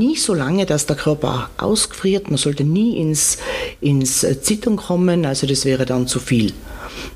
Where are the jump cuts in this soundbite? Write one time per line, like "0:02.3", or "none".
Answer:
none

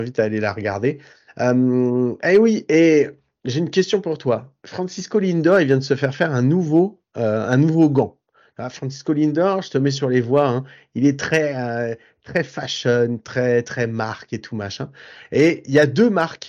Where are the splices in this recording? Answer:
none

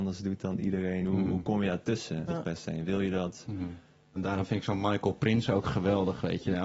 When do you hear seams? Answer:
0:02.3
0:04.2

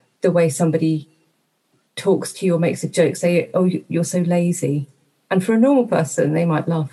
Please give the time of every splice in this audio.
none

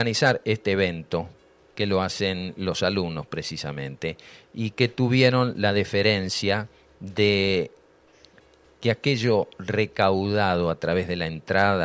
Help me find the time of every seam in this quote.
none

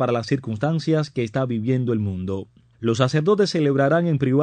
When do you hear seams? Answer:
0:02.7

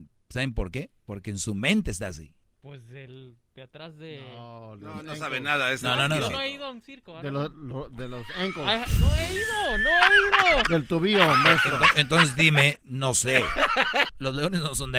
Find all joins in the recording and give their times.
0:02.4
0:14.1

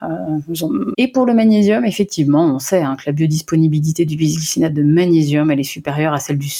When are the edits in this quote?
0:00.9

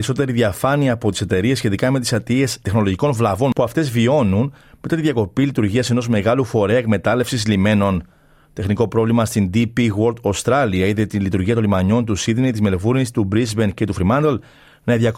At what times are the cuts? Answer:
none

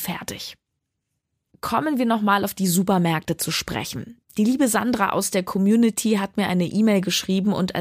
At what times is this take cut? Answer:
none

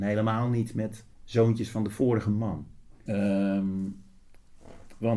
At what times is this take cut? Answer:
0:01.1
0:03.1

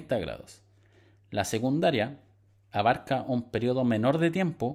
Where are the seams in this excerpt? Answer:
none

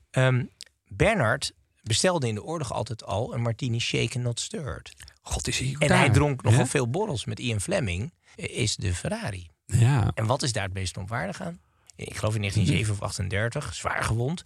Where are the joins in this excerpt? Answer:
0:08.3
0:11.9

